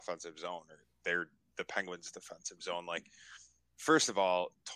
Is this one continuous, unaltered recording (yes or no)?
yes